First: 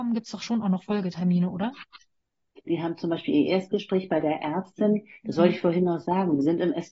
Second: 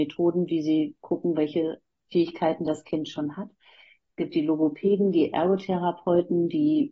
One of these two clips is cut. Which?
first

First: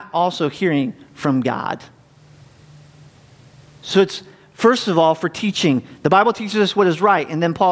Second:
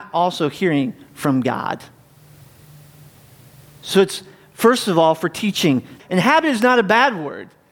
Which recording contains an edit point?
second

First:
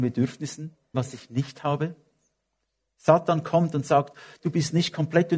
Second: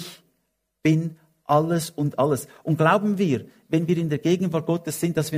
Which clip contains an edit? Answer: first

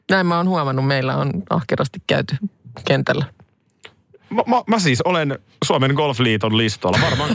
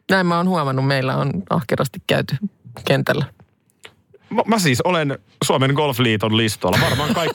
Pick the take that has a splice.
second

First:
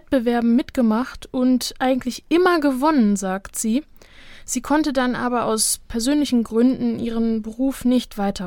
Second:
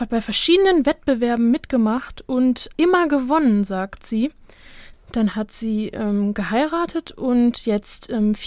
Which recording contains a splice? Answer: second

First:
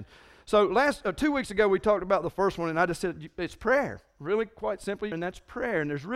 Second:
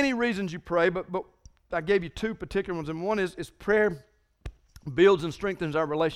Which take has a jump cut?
first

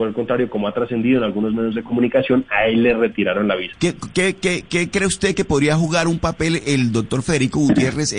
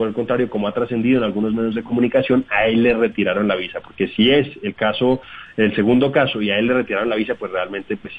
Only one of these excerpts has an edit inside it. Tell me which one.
first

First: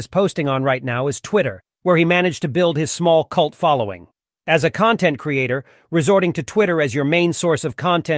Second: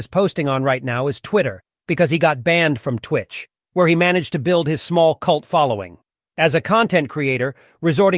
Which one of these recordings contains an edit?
first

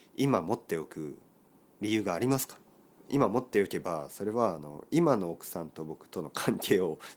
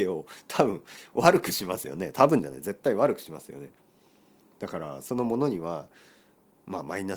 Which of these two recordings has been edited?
first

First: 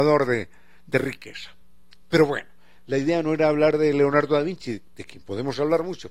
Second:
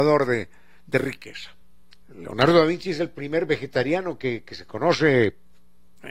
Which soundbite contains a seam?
second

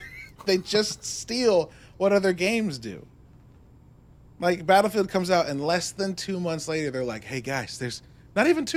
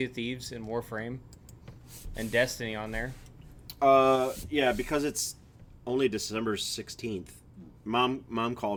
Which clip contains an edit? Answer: second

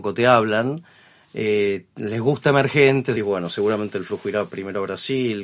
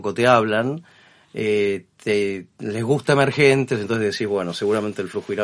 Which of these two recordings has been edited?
first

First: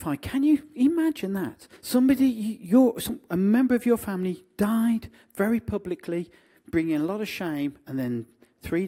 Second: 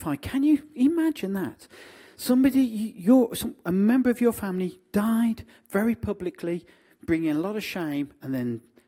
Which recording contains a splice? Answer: first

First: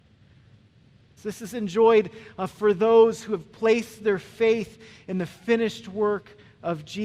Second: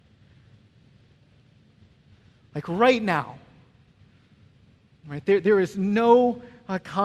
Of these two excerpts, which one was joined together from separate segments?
first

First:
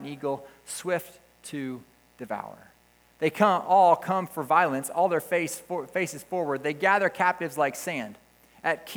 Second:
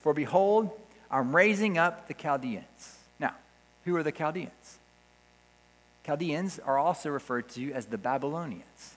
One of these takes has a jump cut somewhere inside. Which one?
second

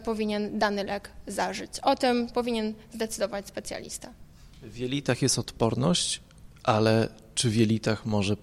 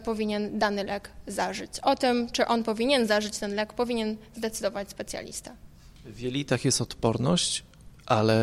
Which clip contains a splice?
first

